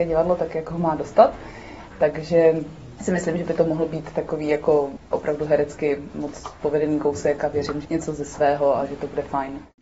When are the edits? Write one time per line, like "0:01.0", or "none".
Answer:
0:01.9
0:07.8